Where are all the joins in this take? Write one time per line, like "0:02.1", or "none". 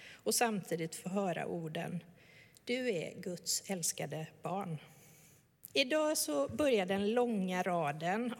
0:05.7